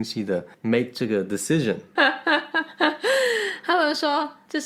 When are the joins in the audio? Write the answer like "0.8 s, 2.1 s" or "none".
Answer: 2.0 s